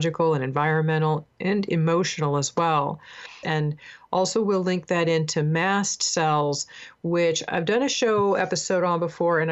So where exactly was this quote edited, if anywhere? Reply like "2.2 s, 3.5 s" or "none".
3.4 s